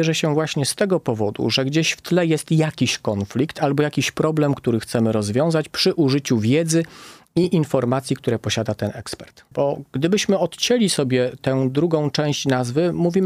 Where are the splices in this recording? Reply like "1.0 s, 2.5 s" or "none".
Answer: 9.5 s